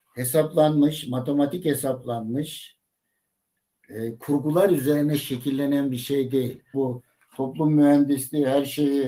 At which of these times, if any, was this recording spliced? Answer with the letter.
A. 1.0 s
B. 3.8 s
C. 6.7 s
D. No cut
C